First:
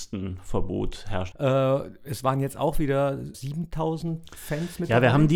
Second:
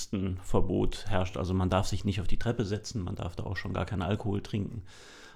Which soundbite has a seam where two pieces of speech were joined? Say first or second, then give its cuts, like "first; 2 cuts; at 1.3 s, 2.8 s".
first; 2 cuts; at 1.3 s, 3.3 s